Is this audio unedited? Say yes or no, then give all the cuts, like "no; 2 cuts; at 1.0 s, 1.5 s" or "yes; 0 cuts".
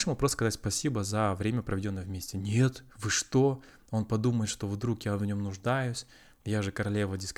no; 1 cut; at 2.9 s